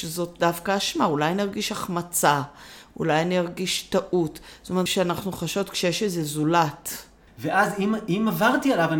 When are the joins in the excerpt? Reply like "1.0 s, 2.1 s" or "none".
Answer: 4.9 s, 7.3 s